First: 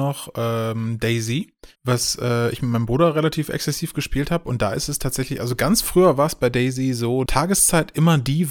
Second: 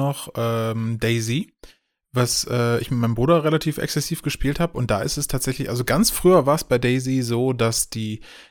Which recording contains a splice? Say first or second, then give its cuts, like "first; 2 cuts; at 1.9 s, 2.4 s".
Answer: first; 2 cuts; at 1.7 s, 7.3 s